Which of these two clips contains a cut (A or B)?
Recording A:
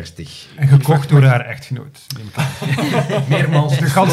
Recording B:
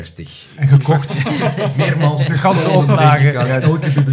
B